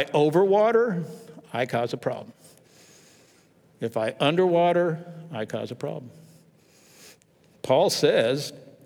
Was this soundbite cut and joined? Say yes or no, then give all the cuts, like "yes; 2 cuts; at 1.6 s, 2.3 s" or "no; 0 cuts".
no; 0 cuts